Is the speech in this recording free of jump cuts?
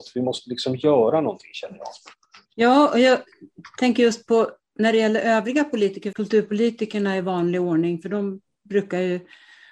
no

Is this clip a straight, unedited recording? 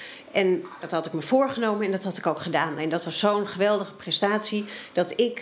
yes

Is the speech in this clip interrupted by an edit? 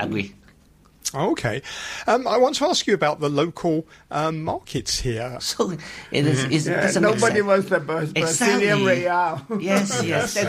yes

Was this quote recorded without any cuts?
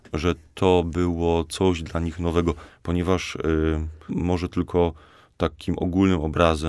no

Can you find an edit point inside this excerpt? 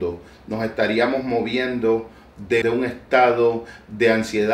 yes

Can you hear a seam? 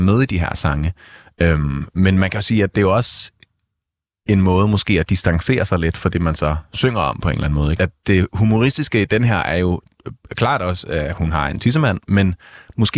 yes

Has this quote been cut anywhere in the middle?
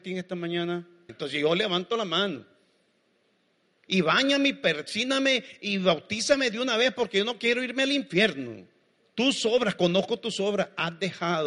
yes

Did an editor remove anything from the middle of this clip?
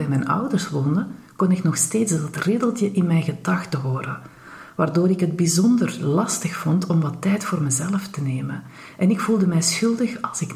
no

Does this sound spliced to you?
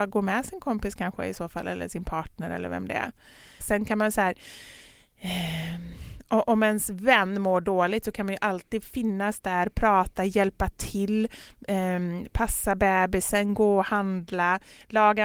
yes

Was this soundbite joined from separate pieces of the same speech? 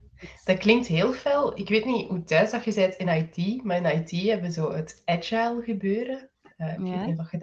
no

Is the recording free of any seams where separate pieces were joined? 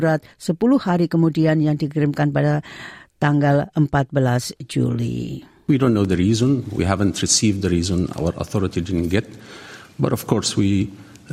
yes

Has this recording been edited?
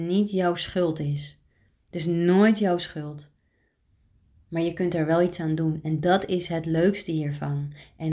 no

